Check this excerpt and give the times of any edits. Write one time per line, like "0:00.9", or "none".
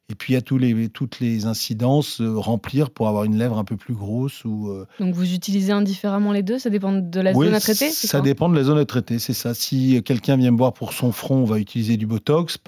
none